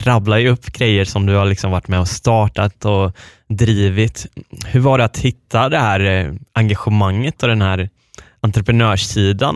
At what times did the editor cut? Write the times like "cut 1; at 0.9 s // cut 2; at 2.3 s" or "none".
none